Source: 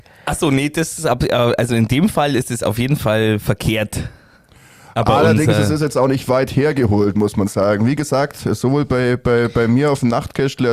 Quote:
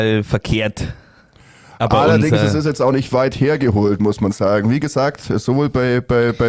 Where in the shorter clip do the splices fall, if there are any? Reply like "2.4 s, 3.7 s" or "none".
none